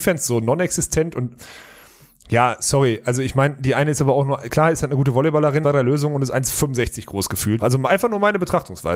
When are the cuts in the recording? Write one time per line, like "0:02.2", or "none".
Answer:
0:05.6
0:07.6